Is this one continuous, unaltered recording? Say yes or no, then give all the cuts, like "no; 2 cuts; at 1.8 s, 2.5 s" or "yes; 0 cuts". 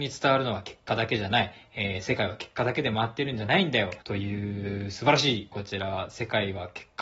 no; 2 cuts; at 4.0 s, 5.5 s